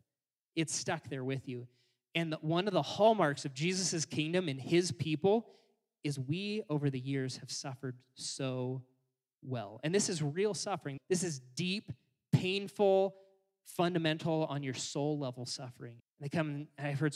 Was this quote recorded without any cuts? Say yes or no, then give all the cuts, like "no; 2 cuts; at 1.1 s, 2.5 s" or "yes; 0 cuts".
no; 2 cuts; at 11.0 s, 16.0 s